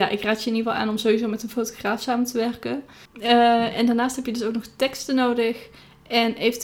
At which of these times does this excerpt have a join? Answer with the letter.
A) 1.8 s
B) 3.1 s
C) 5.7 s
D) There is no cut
B